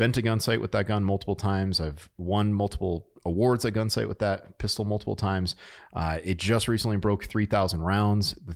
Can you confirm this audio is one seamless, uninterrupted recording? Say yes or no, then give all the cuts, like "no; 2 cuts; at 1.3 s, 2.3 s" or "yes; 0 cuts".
yes; 0 cuts